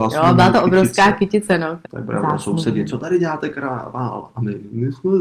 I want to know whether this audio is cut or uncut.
cut